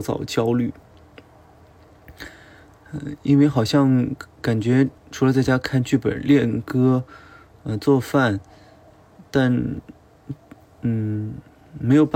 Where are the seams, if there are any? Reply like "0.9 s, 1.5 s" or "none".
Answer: 5.0 s